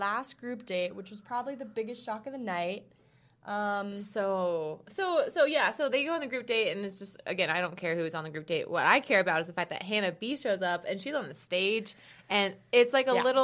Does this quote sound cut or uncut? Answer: uncut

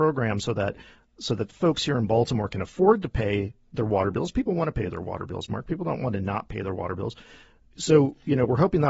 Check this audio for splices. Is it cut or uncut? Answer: uncut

